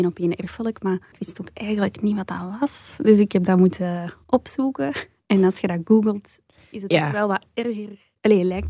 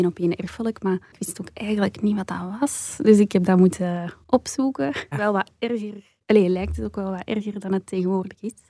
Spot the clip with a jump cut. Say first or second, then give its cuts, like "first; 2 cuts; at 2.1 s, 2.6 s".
second; 1 cut; at 5.1 s